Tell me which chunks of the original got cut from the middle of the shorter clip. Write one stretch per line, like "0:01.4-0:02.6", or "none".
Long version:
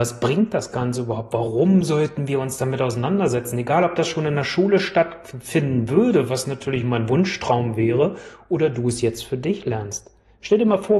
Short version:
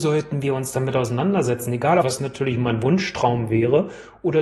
0:03.9-0:06.3